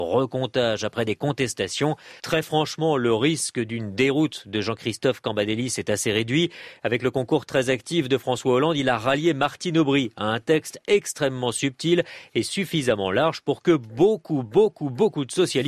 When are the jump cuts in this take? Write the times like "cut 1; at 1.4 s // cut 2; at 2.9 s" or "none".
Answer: cut 1; at 2.2 s